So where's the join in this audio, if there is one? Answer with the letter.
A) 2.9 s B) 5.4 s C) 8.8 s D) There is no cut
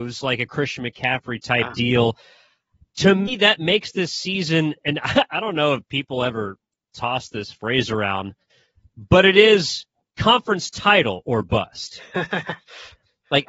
D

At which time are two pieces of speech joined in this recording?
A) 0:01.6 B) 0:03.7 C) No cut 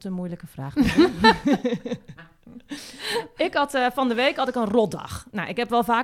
C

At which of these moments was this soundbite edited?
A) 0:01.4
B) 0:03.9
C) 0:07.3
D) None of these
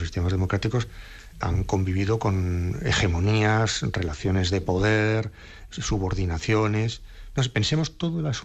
A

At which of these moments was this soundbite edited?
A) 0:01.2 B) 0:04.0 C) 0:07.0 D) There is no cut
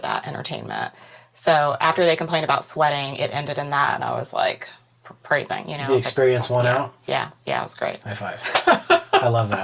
D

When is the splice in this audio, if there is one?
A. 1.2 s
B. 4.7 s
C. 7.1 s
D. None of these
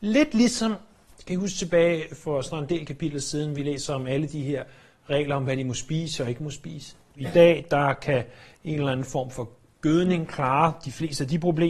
C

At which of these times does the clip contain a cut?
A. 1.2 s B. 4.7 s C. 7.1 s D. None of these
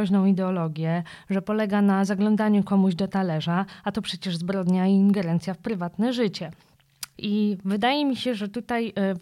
C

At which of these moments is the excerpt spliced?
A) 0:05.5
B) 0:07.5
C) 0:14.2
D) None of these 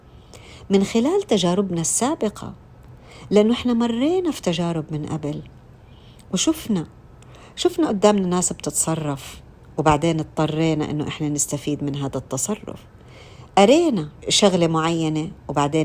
C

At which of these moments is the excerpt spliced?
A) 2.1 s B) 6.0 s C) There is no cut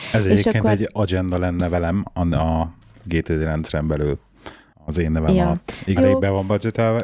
B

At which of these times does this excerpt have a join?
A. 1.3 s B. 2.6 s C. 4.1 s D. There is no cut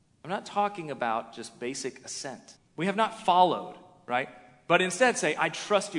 B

